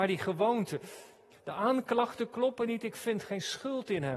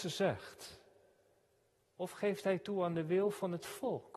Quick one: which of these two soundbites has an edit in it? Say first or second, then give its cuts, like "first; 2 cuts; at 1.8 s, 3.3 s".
first; 1 cut; at 1.3 s